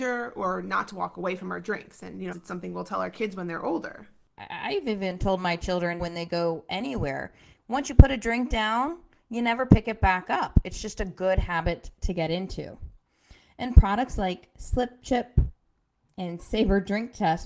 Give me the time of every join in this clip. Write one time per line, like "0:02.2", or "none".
0:02.3
0:06.0